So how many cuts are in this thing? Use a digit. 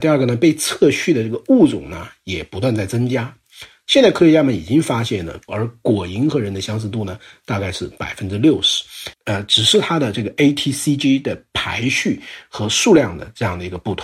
2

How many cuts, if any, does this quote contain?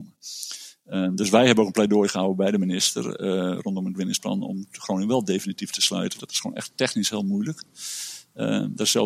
1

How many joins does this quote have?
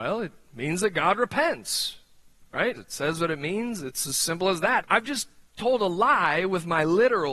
2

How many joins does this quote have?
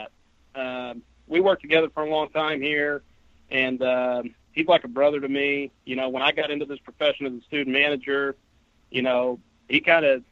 0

